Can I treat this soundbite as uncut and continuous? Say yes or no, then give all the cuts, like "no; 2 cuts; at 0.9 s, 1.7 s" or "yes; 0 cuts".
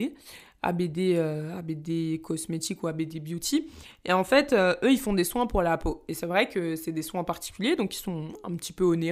yes; 0 cuts